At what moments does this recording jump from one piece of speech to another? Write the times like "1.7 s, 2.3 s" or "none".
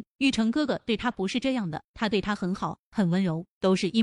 none